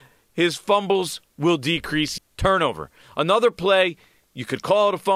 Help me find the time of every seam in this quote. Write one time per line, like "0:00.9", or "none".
0:02.2